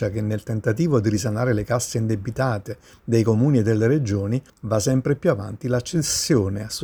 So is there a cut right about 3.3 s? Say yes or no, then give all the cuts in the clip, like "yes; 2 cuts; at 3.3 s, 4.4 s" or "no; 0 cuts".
no; 1 cut; at 4.5 s